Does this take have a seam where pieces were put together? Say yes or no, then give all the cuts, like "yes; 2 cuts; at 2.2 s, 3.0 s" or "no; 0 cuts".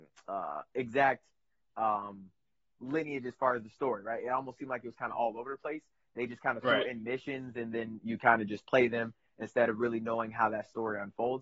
no; 0 cuts